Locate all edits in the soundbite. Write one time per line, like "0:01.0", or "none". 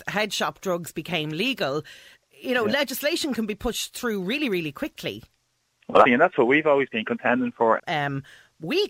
0:06.0
0:07.8